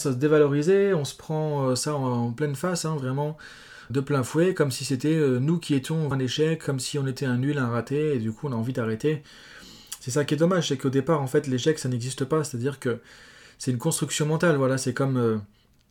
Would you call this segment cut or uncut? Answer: cut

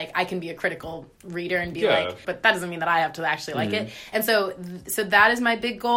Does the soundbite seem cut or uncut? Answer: cut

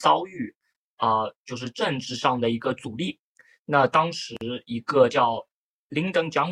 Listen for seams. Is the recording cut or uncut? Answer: uncut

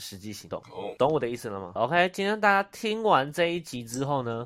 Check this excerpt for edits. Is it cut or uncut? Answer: cut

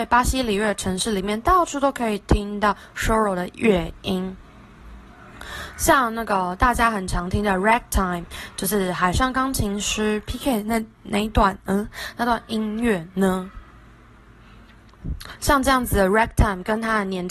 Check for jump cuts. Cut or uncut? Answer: uncut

